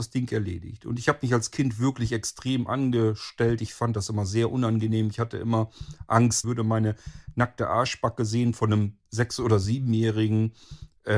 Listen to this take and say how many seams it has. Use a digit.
1